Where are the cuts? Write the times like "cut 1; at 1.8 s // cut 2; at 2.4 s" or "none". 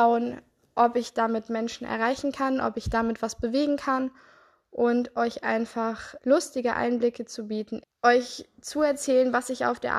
cut 1; at 6.2 s // cut 2; at 7.8 s